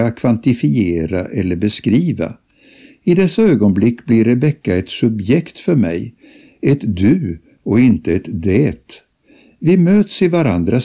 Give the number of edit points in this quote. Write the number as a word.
zero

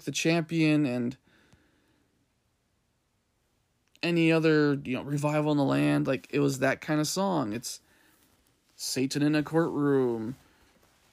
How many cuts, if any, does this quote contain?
zero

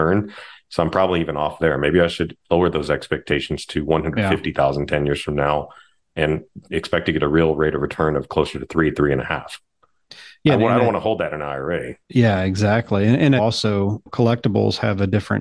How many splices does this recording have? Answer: two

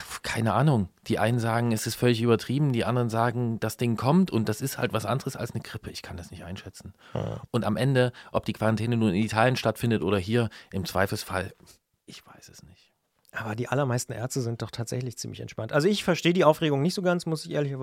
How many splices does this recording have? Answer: zero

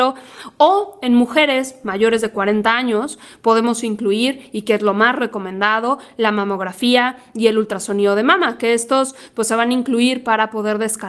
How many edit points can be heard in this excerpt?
zero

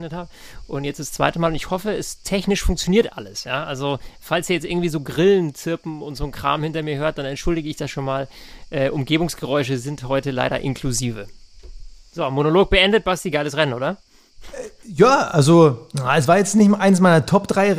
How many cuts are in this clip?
zero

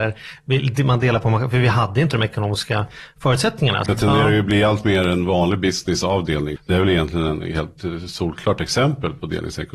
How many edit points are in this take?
two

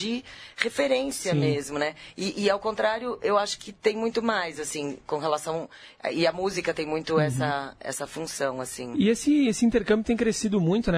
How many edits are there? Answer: zero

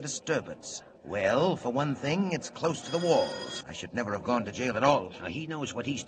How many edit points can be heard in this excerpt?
two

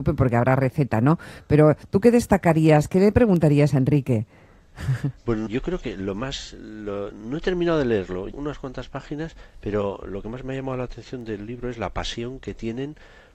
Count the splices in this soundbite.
two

